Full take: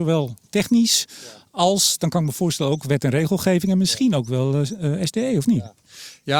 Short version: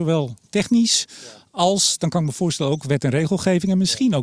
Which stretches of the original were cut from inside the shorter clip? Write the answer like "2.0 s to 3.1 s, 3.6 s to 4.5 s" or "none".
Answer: none